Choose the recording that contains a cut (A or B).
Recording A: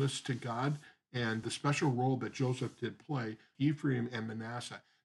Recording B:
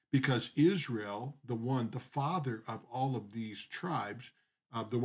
A